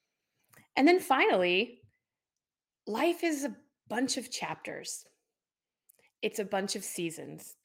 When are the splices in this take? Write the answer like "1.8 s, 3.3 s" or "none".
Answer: none